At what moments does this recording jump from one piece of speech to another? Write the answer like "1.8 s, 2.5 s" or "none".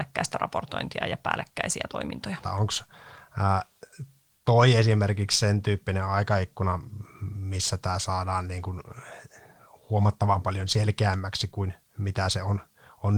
2.4 s